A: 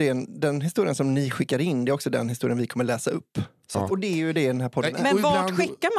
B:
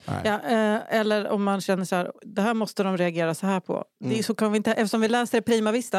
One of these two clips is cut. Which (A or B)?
A